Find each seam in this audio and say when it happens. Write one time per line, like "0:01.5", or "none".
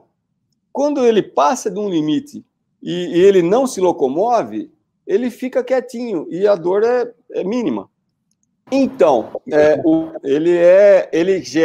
0:08.7
0:10.2